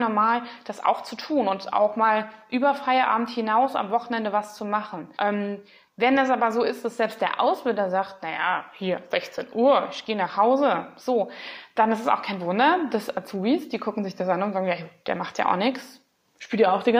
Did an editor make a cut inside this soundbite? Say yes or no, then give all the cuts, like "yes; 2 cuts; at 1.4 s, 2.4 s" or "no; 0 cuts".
yes; 1 cut; at 5.1 s